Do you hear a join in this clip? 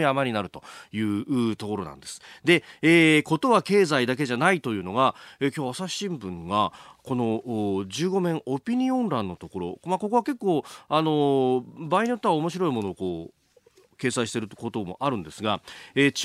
no; 0 cuts

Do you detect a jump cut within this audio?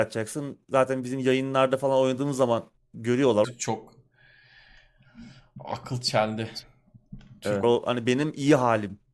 yes; 2 cuts; at 3.4 s, 7.6 s

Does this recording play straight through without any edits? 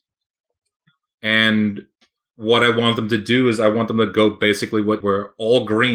no; 2 cuts; at 1.1 s, 5.0 s

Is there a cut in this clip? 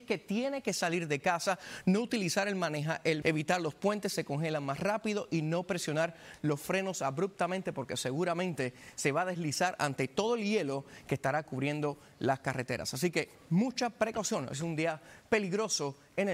yes; 1 cut; at 3.2 s

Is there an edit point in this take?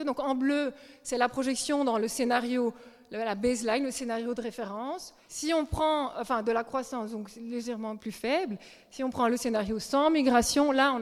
yes; 2 cuts; at 5.2 s, 8.0 s

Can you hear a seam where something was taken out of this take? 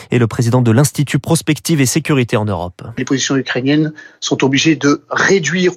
no; 0 cuts

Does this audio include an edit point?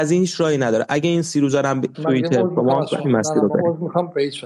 yes; 1 cut; at 1.9 s

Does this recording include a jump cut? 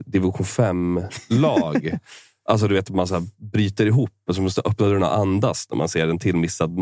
no; 0 cuts

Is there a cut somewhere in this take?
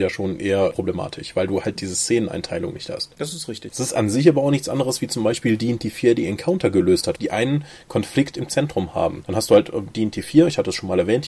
yes; 2 cuts; at 3.7 s, 7.2 s

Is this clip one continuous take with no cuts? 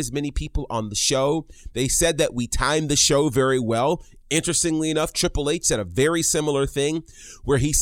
yes; 0 cuts

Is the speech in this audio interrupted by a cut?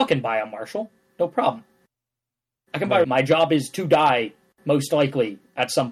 yes; 1 cut; at 3.0 s

